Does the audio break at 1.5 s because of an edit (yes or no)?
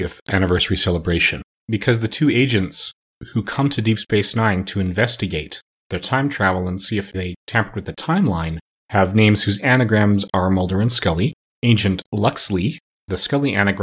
yes